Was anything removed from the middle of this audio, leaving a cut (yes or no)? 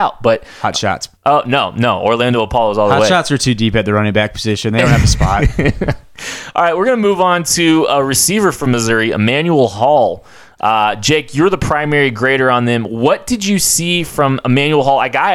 yes